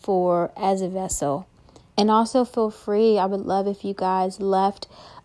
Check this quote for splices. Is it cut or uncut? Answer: cut